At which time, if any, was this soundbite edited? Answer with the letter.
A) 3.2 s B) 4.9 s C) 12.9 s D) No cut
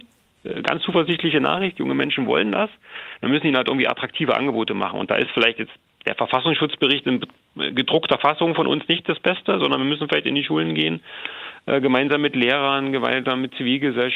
A